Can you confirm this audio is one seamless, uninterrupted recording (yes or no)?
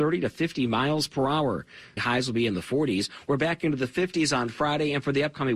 no